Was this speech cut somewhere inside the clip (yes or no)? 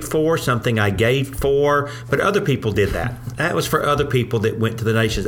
no